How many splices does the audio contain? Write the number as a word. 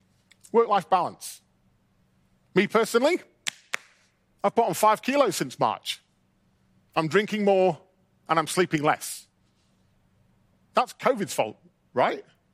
zero